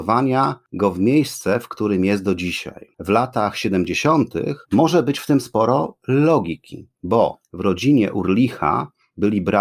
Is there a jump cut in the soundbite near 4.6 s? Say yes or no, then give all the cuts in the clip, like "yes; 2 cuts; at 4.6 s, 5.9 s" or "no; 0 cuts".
yes; 1 cut; at 4.6 s